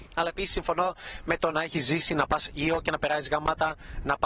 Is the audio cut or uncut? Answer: cut